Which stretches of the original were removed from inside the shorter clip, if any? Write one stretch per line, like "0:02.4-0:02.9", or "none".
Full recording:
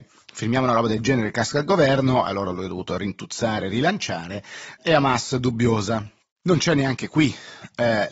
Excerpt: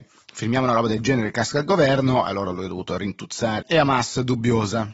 0:03.6-0:04.8